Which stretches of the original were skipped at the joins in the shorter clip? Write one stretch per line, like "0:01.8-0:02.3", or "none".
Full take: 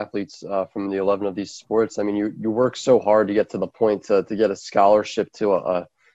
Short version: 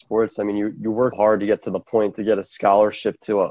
0:02.7-0:03.0
0:04.0-0:04.3